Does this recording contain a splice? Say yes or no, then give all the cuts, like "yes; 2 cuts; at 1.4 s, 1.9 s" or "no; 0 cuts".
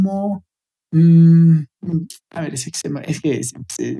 yes; 1 cut; at 2.2 s